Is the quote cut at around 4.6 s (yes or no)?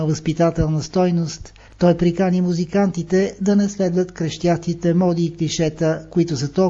no